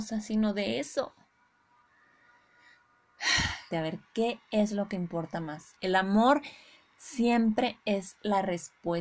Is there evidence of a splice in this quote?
yes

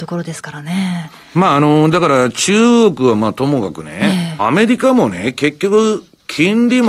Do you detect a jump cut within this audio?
yes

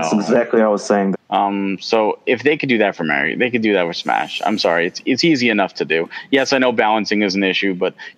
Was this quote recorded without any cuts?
no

